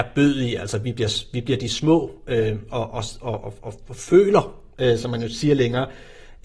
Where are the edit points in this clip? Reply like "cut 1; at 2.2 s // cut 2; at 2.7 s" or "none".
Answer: none

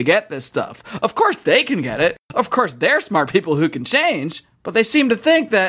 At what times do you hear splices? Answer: cut 1; at 4.5 s

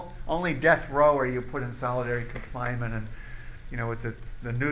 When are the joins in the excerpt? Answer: none

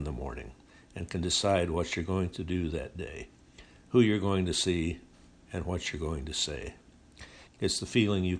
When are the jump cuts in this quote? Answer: cut 1; at 7.5 s

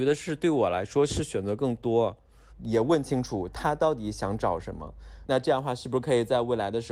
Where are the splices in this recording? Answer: cut 1; at 2.5 s // cut 2; at 5.2 s

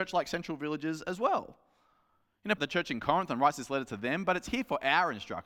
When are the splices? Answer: cut 1; at 2.6 s

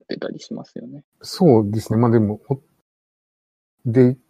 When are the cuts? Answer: none

